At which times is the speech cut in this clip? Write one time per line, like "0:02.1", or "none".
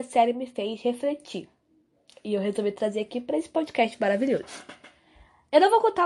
none